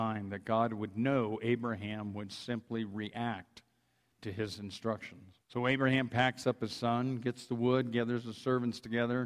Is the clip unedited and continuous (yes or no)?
no